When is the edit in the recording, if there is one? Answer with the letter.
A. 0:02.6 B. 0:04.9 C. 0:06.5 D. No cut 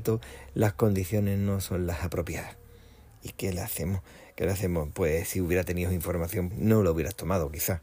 C